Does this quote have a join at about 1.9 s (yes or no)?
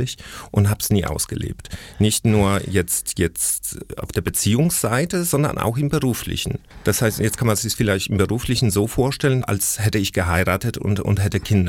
no